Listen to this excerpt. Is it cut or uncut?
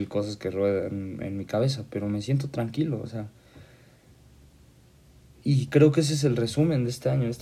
uncut